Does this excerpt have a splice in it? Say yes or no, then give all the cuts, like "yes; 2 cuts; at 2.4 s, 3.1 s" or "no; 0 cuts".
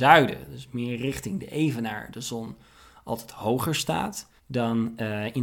yes; 1 cut; at 4.4 s